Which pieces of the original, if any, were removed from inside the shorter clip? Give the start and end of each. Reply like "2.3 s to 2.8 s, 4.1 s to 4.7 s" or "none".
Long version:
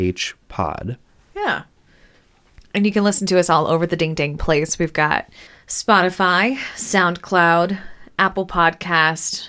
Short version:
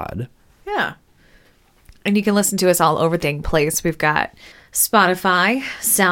3.9 s to 4.2 s